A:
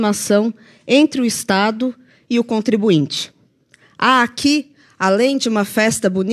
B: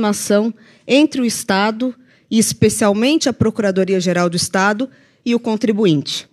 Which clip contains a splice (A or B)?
A